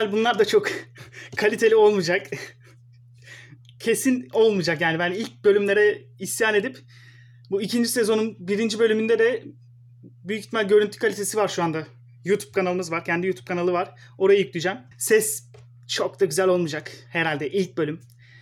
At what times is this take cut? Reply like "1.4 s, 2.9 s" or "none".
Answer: 14.9 s